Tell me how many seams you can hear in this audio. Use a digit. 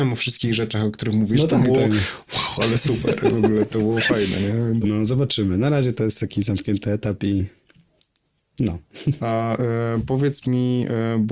2